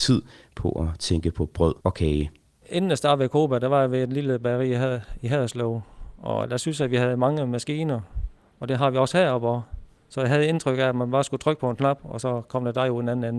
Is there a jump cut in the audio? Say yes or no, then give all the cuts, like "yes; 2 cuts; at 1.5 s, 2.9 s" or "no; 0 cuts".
yes; 1 cut; at 1.8 s